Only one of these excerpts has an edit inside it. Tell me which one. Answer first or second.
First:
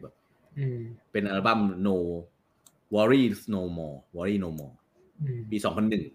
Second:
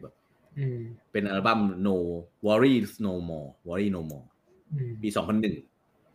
second